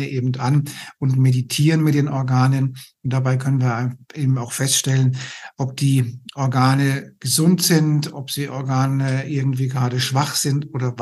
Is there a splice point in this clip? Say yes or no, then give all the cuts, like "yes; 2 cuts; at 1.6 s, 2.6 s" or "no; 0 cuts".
no; 0 cuts